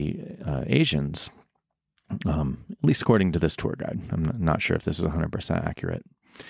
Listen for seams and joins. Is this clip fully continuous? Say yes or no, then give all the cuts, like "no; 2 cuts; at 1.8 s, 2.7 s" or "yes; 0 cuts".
yes; 0 cuts